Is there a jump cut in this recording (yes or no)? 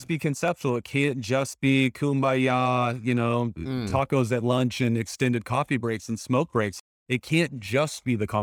no